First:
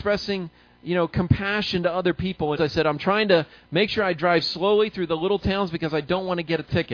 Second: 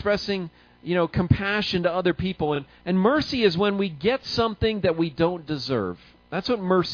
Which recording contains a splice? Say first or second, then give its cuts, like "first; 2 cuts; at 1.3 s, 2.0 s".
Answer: first; 1 cut; at 2.6 s